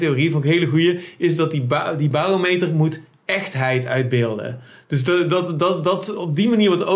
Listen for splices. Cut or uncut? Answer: uncut